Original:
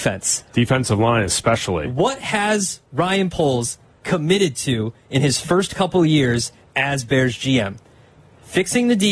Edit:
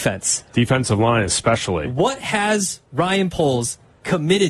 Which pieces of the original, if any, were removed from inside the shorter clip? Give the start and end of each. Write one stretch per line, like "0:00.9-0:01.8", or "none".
none